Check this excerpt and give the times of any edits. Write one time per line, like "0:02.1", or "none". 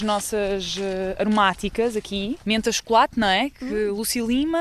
0:02.4